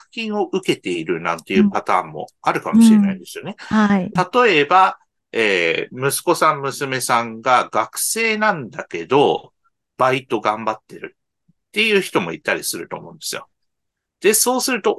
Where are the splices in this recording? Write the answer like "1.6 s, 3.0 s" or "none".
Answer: 4.2 s